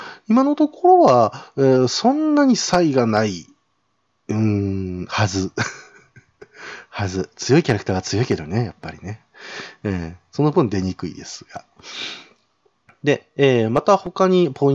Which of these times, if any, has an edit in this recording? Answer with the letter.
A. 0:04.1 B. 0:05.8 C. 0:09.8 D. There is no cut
D